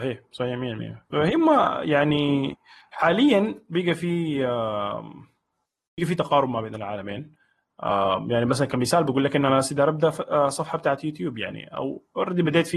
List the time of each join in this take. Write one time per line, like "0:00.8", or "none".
0:01.1